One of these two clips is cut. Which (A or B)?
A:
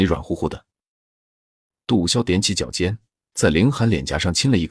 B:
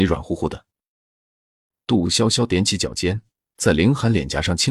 A